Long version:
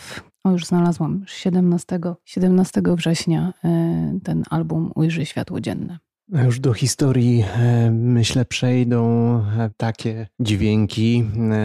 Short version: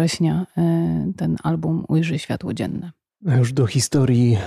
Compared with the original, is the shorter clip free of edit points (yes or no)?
yes